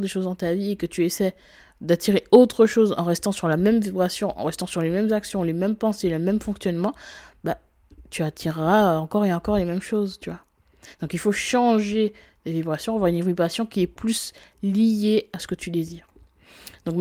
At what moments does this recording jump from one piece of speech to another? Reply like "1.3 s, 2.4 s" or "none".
none